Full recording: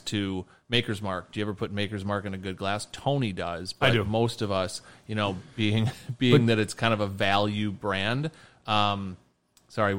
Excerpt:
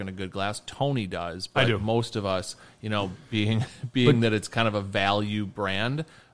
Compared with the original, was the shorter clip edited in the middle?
no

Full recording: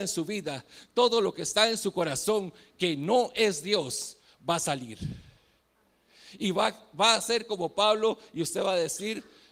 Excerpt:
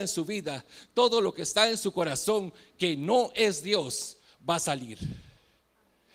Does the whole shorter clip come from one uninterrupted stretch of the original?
yes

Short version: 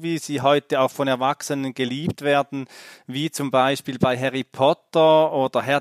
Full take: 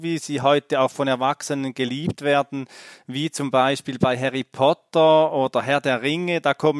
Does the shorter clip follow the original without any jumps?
yes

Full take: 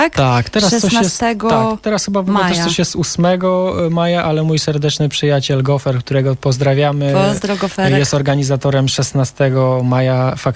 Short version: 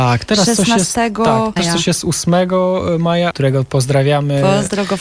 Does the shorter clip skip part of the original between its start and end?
yes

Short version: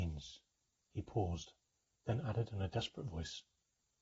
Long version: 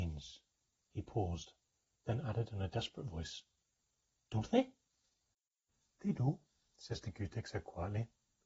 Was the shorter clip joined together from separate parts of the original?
no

